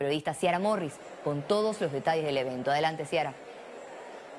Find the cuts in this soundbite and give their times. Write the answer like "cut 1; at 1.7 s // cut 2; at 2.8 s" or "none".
none